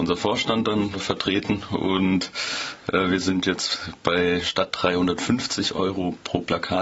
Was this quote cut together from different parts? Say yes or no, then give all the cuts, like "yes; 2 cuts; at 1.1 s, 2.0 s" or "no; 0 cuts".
no; 0 cuts